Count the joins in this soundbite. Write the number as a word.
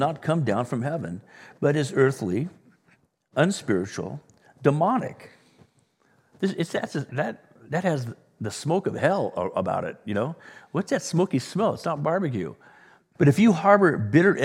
two